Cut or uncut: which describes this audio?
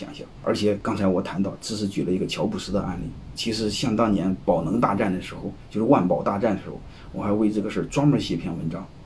uncut